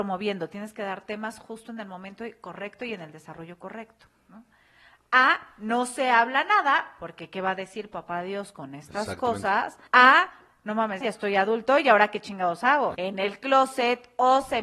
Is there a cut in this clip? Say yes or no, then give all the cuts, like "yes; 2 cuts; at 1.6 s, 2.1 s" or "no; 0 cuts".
yes; 3 cuts; at 9.9 s, 11.0 s, 12.9 s